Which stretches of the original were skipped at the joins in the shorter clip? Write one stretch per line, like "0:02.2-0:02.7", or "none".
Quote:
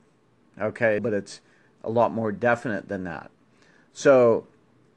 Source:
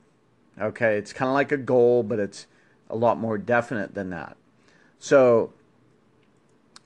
0:01.0-0:02.0